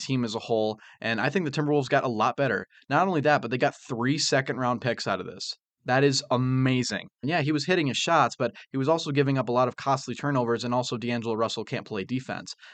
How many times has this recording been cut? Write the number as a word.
two